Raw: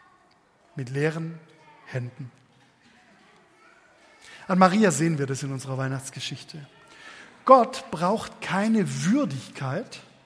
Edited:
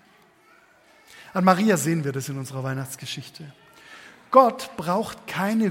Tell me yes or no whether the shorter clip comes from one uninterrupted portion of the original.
yes